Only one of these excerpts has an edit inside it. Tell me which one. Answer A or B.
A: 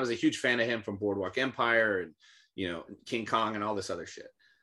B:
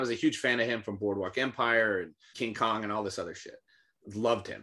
B